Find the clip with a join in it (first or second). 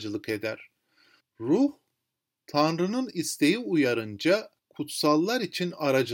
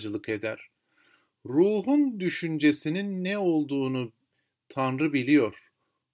first